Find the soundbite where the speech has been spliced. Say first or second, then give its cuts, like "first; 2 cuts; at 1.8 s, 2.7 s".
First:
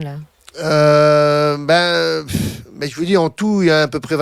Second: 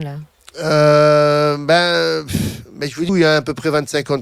second; 1 cut; at 3.1 s